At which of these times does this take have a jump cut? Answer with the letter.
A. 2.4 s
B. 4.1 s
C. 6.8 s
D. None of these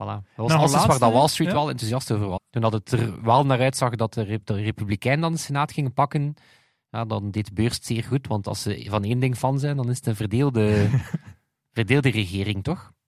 A